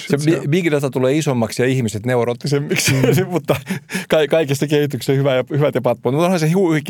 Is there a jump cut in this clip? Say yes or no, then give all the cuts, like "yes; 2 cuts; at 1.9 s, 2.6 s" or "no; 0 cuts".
no; 0 cuts